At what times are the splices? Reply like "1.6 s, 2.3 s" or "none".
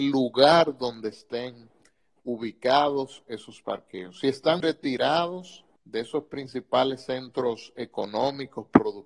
4.6 s, 5.8 s